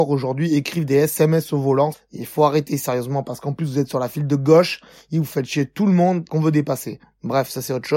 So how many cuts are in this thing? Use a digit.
2